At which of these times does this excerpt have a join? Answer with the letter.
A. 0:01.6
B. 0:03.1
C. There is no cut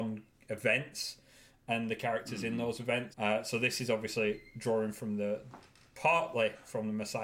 B